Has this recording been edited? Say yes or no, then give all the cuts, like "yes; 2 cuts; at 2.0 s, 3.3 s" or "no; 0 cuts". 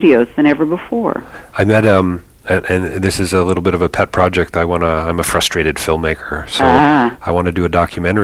no; 0 cuts